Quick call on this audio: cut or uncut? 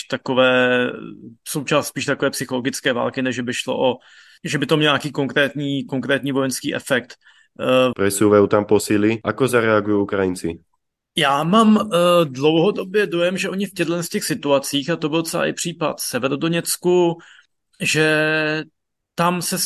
cut